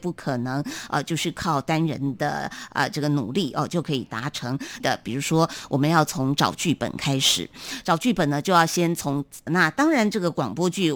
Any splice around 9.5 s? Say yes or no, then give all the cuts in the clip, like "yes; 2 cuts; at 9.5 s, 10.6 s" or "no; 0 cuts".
yes; 2 cuts; at 4.8 s, 9.5 s